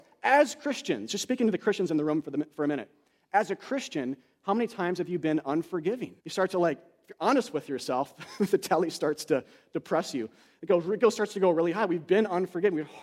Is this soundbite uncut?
no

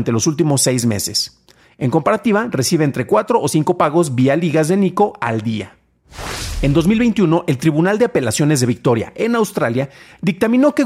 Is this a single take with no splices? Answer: yes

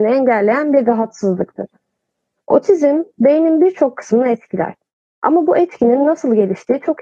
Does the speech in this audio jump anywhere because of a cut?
no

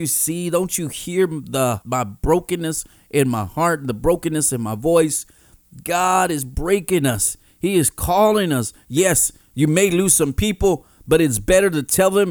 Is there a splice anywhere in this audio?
yes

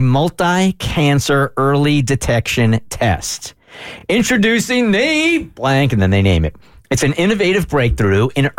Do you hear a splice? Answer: no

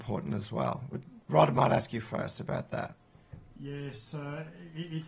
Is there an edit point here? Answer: no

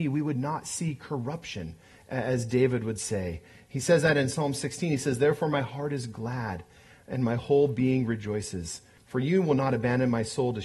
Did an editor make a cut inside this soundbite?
yes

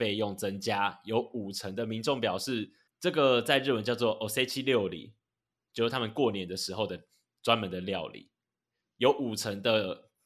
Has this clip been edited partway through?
yes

